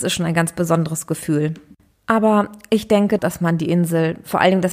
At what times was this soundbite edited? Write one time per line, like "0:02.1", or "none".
0:01.9
0:03.2